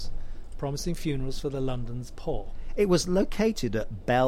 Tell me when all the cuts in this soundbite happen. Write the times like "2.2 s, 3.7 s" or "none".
none